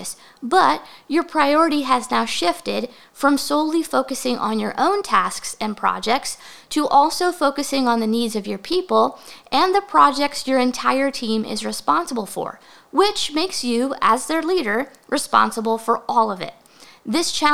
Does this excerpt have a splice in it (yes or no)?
no